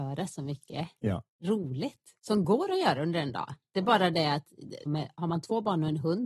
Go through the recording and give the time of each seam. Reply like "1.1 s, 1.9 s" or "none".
2.2 s, 4.9 s